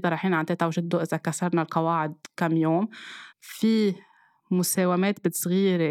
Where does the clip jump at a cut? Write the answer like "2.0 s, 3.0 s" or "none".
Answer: 3.3 s